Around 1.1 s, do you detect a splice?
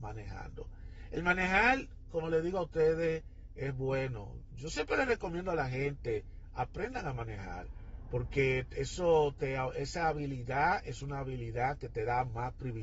no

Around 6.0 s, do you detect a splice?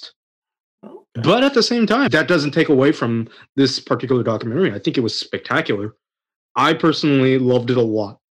no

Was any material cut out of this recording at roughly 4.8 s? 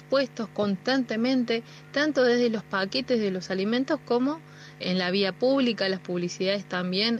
yes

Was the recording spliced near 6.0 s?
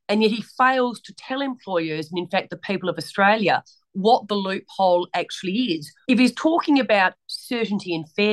yes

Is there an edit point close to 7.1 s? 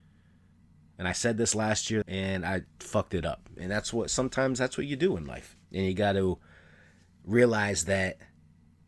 no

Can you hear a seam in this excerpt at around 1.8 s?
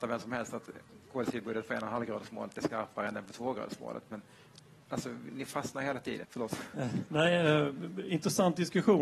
no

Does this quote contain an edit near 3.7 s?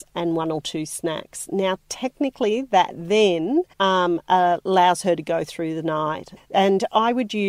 yes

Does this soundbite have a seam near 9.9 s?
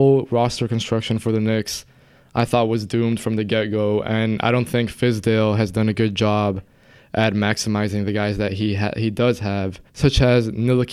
yes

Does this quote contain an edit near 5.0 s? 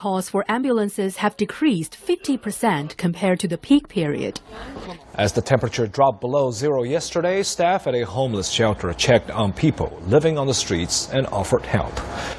yes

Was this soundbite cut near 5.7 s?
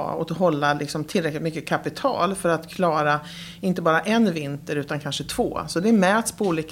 no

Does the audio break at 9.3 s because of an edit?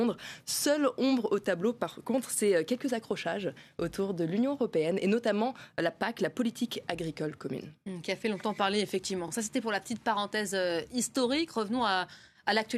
no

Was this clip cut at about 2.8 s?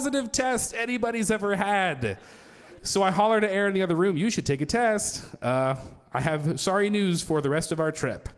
yes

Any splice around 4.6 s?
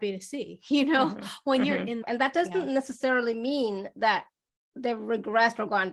no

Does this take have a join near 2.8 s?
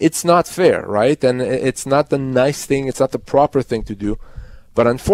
no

